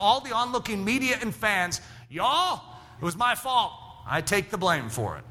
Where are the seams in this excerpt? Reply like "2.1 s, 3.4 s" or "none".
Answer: none